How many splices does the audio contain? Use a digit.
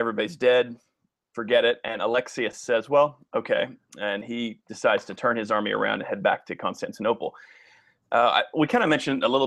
0